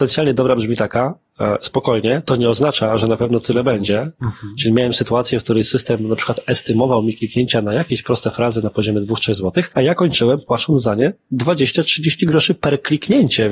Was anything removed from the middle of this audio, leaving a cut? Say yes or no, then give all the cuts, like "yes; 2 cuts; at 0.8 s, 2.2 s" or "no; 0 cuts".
yes; 1 cut; at 4.2 s